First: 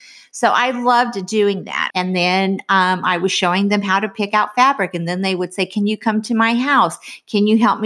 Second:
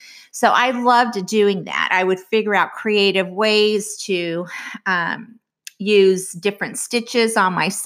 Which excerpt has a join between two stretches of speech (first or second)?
first